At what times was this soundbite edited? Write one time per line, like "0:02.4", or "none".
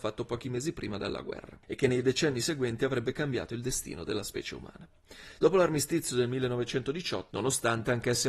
0:05.4
0:07.3